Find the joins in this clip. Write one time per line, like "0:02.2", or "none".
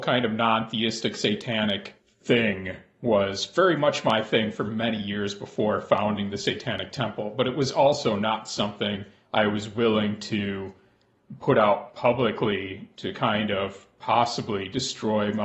none